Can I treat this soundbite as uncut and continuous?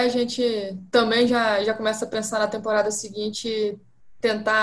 yes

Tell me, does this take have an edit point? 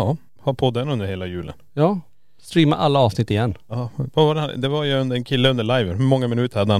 no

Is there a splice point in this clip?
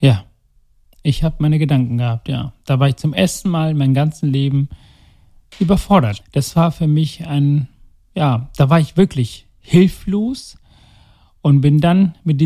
yes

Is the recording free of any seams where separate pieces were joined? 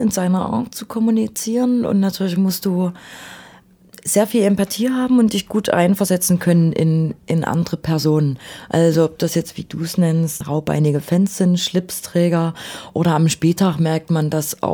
no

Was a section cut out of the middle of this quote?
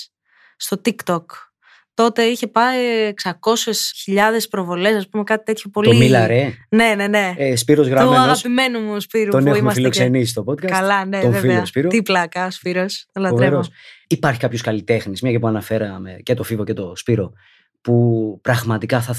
no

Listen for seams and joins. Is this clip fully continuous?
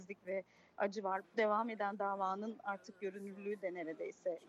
no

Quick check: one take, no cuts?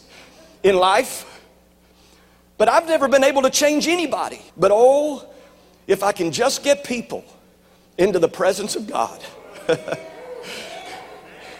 no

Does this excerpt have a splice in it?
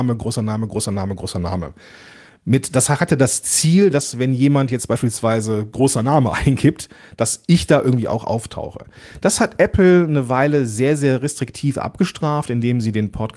no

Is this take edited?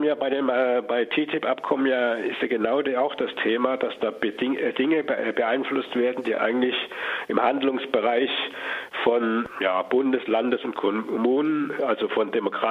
no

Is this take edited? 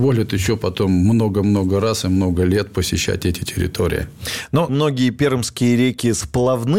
yes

